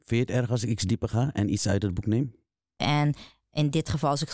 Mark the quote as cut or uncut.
cut